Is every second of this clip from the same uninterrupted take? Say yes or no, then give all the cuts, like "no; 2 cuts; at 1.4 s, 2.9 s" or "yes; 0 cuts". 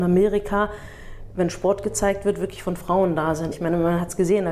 no; 1 cut; at 3.5 s